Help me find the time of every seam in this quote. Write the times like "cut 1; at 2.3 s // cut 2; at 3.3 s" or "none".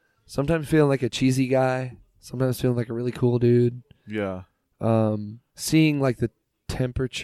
cut 1; at 5.5 s